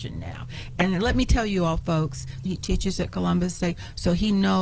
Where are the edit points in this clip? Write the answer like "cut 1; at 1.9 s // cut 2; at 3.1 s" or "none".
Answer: cut 1; at 2.5 s

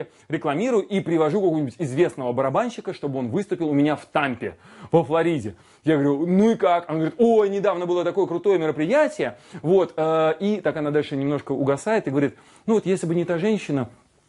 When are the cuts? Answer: none

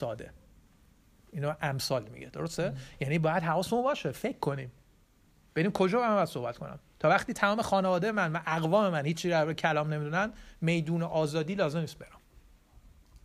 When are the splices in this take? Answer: none

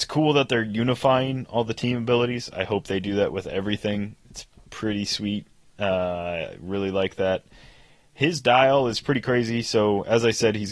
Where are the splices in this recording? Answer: none

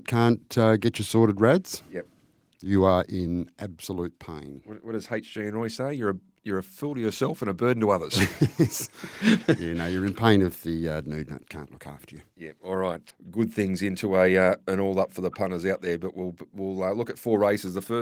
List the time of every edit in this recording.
cut 1; at 13.1 s

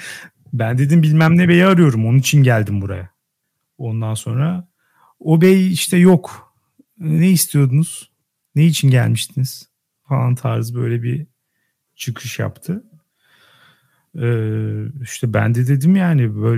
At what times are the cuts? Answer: none

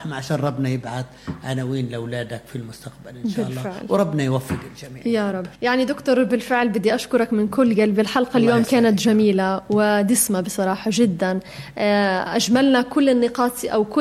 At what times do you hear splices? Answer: cut 1; at 5.5 s

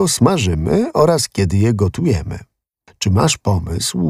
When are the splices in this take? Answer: cut 1; at 2.9 s

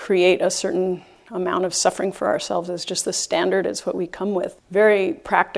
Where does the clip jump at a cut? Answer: cut 1; at 4.6 s

